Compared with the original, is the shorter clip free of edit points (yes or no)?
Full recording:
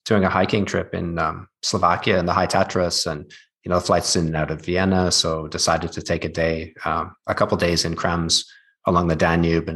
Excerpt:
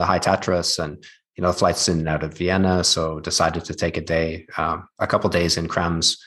yes